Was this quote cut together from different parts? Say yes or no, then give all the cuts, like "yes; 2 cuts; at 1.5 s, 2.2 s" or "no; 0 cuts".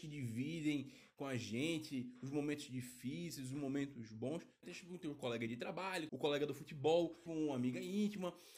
yes; 3 cuts; at 4.6 s, 6.1 s, 7.3 s